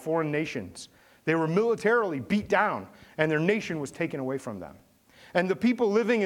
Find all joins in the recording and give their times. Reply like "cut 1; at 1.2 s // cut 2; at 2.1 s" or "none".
none